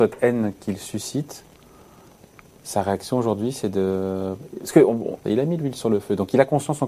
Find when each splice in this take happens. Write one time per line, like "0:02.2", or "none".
0:05.2